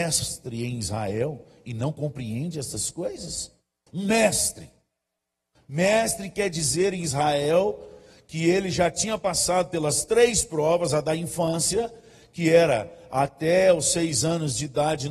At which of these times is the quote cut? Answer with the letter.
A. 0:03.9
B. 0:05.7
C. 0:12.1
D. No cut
A